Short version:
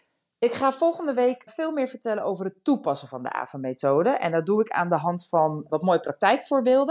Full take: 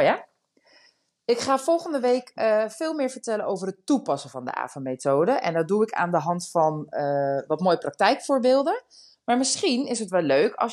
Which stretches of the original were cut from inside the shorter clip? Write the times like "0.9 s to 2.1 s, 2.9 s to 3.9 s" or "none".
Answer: 2.3 s to 2.7 s, 6.9 s to 7.5 s